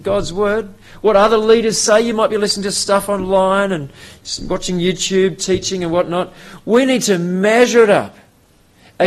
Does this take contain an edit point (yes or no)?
no